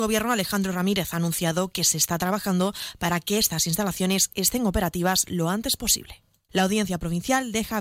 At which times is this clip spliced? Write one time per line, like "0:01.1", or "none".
0:06.5